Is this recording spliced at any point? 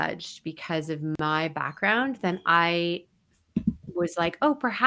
no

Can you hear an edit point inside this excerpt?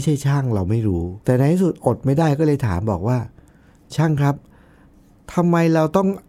yes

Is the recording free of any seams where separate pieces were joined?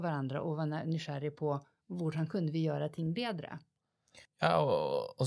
no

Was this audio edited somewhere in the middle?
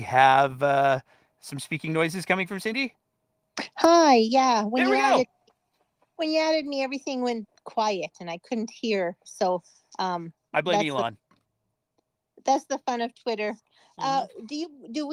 no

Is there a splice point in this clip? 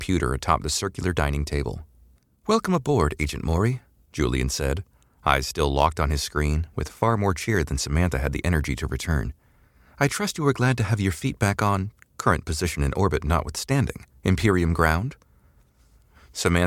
no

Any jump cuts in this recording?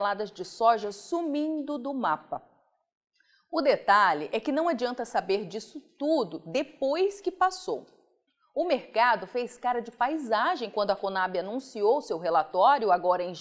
no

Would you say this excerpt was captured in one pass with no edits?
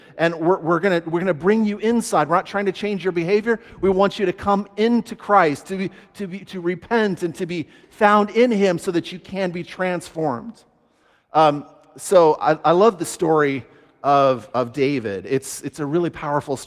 yes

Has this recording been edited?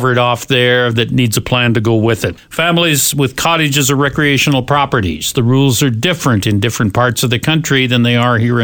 no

